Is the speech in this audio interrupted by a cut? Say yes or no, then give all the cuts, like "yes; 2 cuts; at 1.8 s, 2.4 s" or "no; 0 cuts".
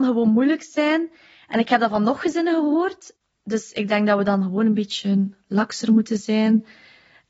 no; 0 cuts